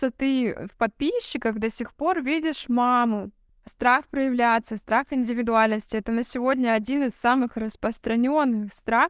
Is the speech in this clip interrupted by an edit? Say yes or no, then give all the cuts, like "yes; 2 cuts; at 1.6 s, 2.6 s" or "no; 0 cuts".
yes; 1 cut; at 3.5 s